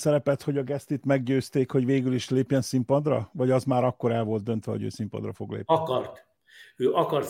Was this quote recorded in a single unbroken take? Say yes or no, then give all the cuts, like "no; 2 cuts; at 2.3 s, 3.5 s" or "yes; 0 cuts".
yes; 0 cuts